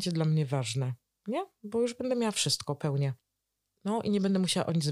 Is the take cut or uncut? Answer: uncut